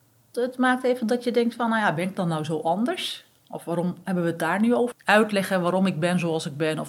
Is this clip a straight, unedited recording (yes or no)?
no